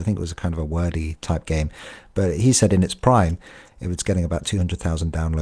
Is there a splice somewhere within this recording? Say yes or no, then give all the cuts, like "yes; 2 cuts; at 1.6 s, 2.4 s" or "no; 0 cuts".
no; 0 cuts